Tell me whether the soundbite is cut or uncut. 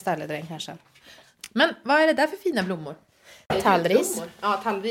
uncut